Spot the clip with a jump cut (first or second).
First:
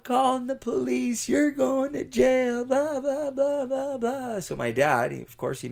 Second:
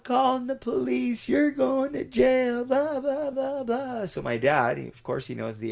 second